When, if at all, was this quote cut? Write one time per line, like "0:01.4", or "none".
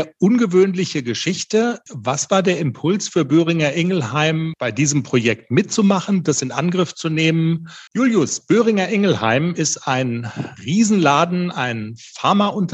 0:07.9
0:10.6